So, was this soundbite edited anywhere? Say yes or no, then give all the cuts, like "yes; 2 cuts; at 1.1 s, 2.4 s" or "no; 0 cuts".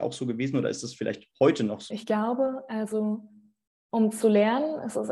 yes; 1 cut; at 1.9 s